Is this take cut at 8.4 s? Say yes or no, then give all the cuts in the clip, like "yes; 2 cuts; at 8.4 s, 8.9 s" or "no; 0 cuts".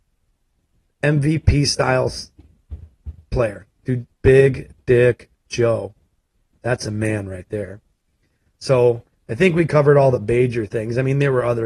no; 1 cut; at 4.1 s